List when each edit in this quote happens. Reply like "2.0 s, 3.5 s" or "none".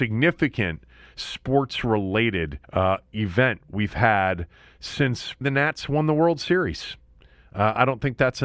2.6 s, 5.4 s